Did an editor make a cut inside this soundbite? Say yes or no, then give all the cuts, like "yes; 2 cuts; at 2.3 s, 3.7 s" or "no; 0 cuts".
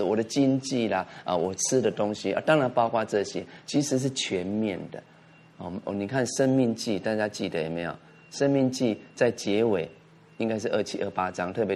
no; 0 cuts